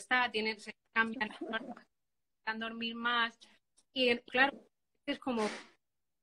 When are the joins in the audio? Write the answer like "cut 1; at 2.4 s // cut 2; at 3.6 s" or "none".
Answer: cut 1; at 4.3 s